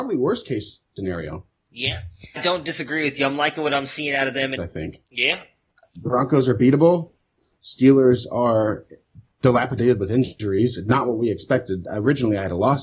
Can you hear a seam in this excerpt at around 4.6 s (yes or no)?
yes